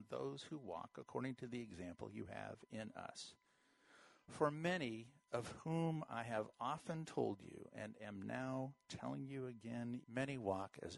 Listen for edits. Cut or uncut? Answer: cut